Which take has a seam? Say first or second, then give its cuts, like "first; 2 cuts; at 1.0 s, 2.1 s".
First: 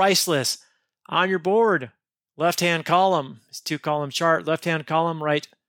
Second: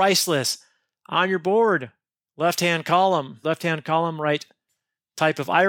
second; 1 cut; at 3.4 s